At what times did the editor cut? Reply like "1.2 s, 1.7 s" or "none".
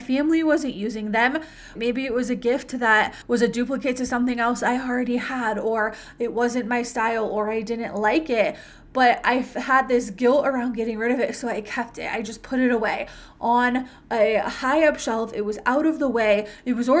1.7 s